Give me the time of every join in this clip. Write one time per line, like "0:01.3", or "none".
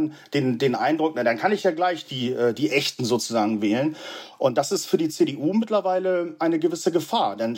none

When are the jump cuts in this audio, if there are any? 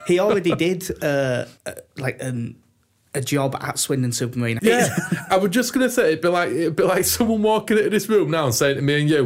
0:01.6
0:04.6

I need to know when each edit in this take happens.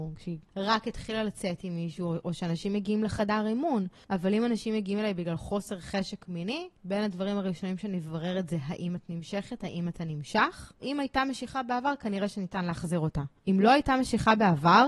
0:10.8

